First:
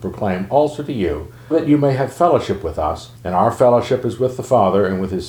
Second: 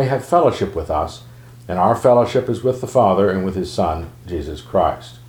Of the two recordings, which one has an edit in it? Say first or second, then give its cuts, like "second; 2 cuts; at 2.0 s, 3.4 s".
first; 2 cuts; at 1.5 s, 3.2 s